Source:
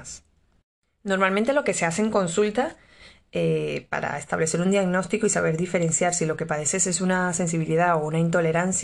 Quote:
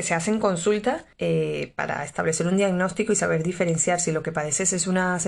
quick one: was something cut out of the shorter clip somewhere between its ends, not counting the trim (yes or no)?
yes